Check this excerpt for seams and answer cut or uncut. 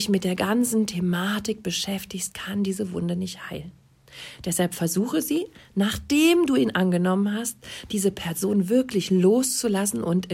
cut